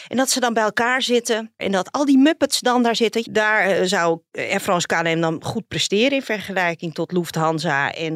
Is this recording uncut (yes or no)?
no